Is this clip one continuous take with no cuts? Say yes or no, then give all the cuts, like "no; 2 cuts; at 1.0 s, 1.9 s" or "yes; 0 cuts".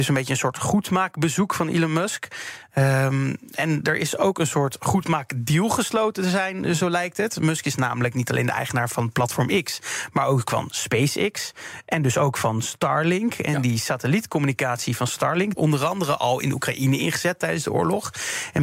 no; 1 cut; at 15.5 s